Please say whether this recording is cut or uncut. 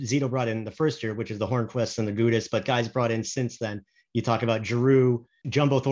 uncut